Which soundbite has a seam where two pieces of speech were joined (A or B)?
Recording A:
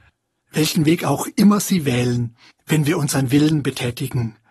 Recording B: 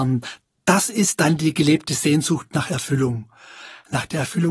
A